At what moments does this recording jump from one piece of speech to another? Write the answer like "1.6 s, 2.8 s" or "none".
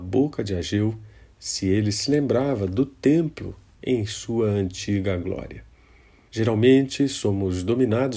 6.3 s